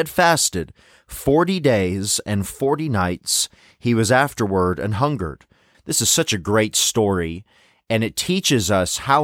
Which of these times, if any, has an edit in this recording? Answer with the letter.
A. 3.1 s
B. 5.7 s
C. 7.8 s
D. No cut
B